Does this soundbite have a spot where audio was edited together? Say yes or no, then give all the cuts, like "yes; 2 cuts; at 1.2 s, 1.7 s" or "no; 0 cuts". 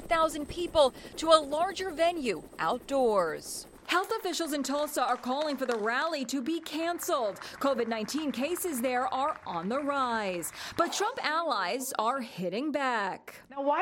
no; 0 cuts